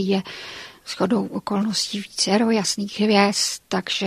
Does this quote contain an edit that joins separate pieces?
no; 0 cuts

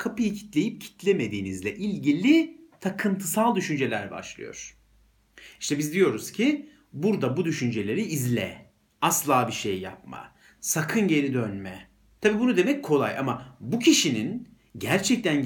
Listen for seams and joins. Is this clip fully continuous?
no; 1 cut; at 12.2 s

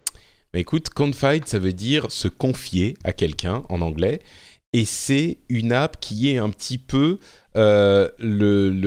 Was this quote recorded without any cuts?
yes; 0 cuts

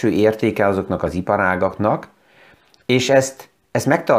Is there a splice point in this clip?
no; 0 cuts

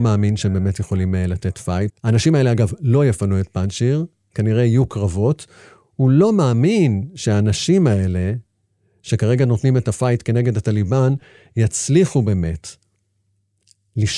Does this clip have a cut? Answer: yes; 1 cut; at 1.9 s

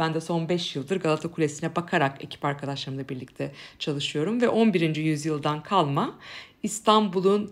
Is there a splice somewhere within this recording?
no; 0 cuts

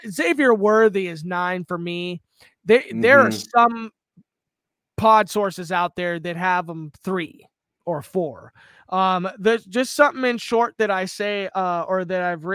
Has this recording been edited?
no; 0 cuts

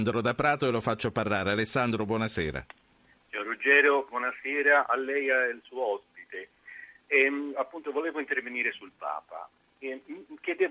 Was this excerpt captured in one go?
yes; 0 cuts

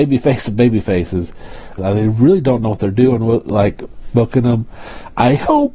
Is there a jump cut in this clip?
yes; 1 cut; at 1.8 s

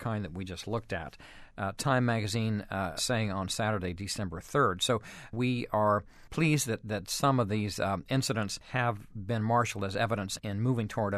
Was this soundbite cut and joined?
yes; 1 cut; at 3.0 s

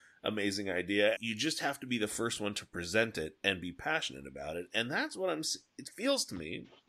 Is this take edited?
yes; 1 cut; at 1.2 s

